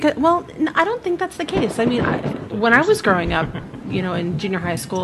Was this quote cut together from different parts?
yes; 2 cuts; at 2.3 s, 3.9 s

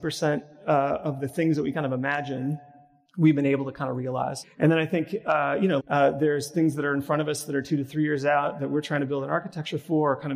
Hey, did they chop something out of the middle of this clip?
yes; 2 cuts; at 4.4 s, 5.8 s

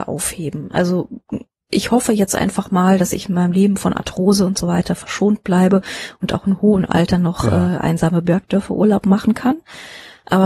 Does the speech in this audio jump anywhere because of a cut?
no; 0 cuts

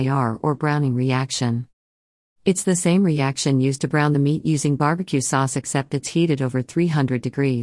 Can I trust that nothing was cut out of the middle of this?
yes; 0 cuts

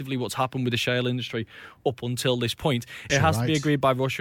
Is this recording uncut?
no; 1 cut; at 3.1 s

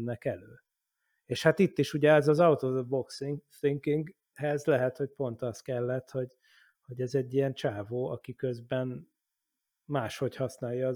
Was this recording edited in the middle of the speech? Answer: no; 0 cuts

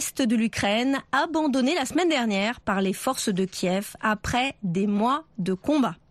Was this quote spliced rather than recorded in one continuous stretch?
no; 0 cuts

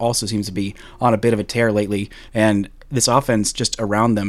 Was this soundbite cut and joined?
no; 0 cuts

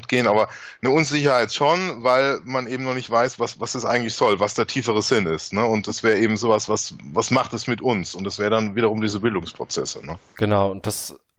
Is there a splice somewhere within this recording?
no; 0 cuts

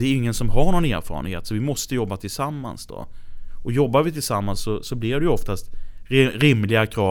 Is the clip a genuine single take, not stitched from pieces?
yes; 0 cuts

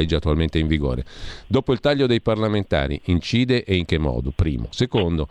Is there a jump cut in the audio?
no; 0 cuts

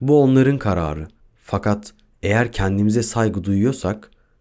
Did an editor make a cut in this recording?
yes; 1 cut; at 1.2 s

